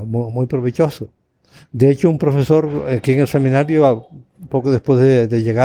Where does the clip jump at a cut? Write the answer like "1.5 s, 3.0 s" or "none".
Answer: none